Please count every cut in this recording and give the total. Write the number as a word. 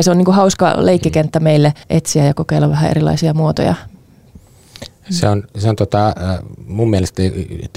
one